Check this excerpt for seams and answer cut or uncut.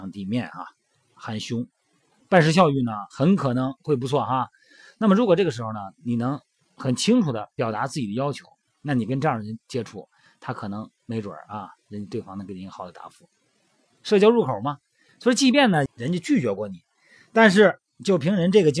cut